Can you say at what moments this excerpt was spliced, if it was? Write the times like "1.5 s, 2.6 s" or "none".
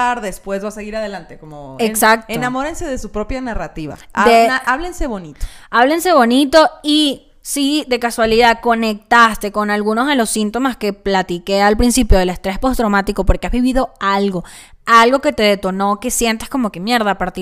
none